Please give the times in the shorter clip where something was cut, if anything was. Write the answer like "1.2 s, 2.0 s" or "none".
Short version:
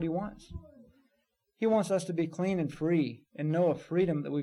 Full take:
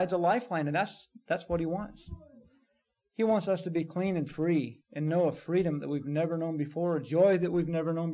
none